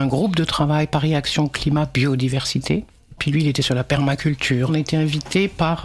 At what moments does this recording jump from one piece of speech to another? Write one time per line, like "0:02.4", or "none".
0:03.2
0:04.7